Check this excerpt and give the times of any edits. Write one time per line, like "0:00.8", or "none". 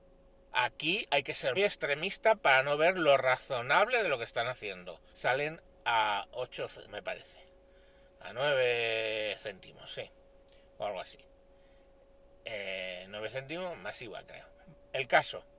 0:01.6
0:05.1
0:06.9